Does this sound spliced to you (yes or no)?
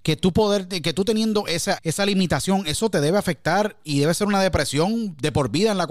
yes